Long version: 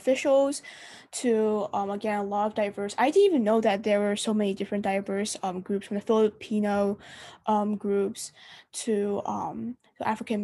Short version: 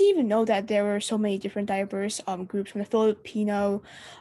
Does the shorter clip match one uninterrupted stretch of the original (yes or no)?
yes